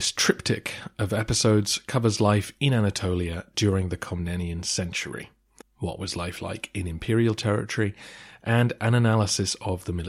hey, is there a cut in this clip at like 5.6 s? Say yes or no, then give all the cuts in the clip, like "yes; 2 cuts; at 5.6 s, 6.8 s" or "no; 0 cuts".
yes; 1 cut; at 5.6 s